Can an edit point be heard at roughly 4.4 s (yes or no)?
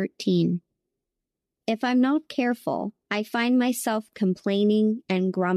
no